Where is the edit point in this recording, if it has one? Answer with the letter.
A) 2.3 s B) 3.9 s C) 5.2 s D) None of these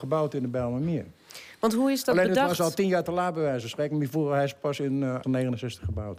C